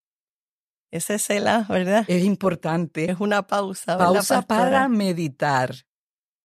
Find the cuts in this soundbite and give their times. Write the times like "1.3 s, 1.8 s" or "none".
none

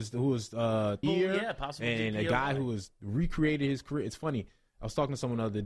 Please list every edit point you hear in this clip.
1.0 s

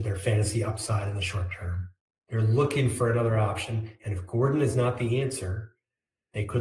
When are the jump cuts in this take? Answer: 2.2 s

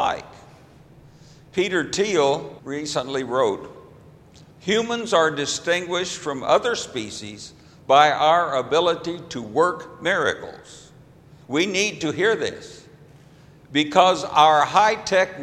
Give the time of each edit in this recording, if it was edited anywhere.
2.6 s, 11.4 s

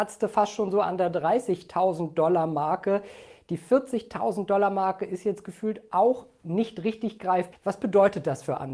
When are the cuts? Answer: 7.5 s

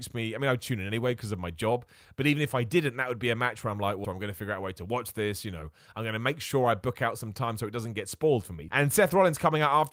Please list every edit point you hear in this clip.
4.0 s, 8.7 s

